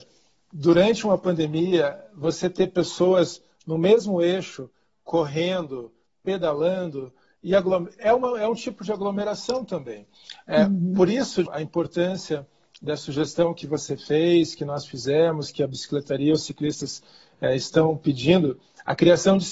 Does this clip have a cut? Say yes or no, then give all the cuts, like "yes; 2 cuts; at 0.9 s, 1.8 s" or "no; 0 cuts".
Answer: yes; 1 cut; at 11.5 s